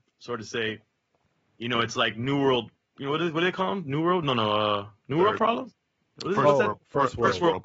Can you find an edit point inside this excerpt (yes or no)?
no